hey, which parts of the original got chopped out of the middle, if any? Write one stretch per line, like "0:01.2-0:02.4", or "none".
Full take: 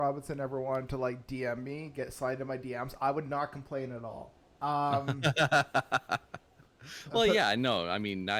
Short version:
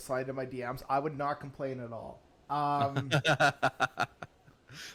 none